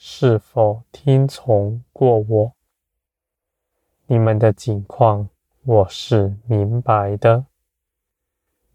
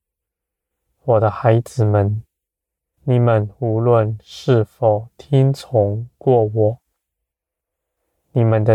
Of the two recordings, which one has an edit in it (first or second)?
second